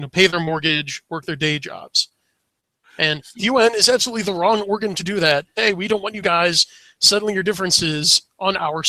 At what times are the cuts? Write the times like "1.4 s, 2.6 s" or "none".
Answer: 2.8 s, 5.6 s

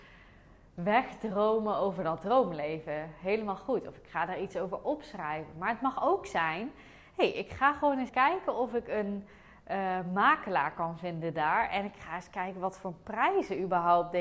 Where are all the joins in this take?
8.1 s

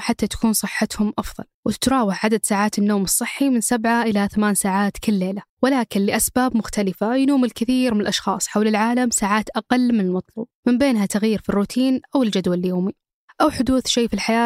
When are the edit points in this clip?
1.5 s, 5.5 s, 10.6 s

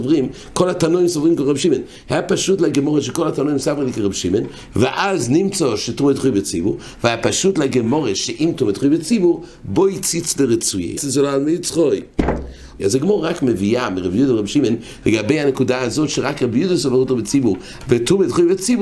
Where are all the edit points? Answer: 11.0 s, 12.8 s, 17.8 s

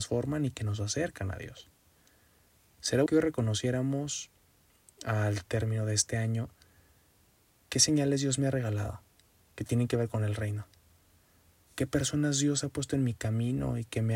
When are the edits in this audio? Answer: 3.1 s

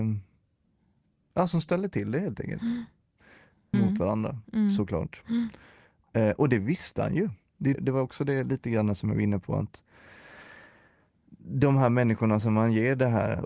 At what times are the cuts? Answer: 3.7 s, 7.7 s

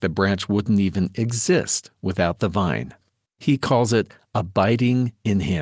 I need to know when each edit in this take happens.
3.3 s

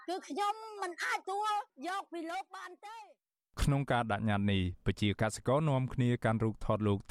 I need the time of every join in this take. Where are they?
1.2 s

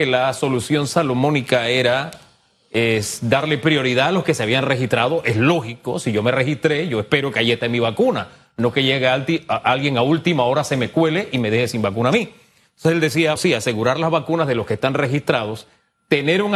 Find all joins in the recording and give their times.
13.4 s

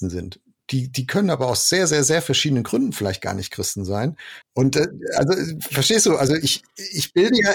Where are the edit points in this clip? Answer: 4.4 s

